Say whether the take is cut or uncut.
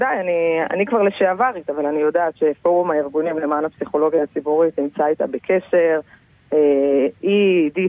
uncut